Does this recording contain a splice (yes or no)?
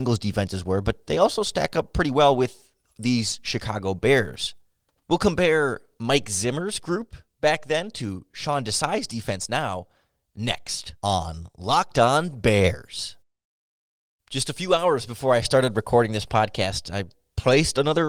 yes